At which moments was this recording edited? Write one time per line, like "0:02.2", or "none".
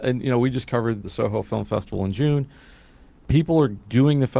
0:01.0